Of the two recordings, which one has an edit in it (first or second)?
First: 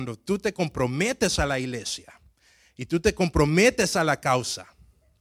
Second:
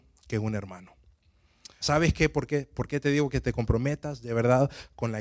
second